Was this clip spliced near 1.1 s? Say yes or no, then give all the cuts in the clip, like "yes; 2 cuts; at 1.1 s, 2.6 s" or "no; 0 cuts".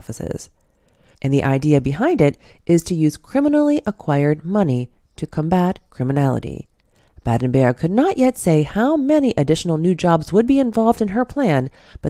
yes; 1 cut; at 1.1 s